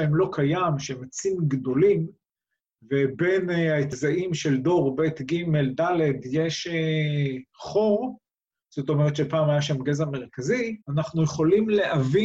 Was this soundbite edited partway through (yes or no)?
yes